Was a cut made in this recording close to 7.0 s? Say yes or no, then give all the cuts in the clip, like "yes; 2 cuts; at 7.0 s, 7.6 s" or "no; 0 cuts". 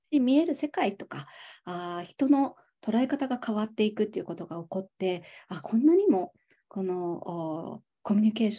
no; 0 cuts